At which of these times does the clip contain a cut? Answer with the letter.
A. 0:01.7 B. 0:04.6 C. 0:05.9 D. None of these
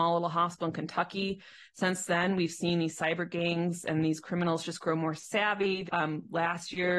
C